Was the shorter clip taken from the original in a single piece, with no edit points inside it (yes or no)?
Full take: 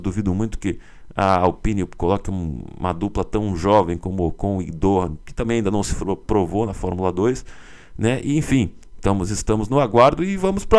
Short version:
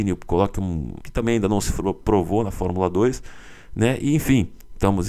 no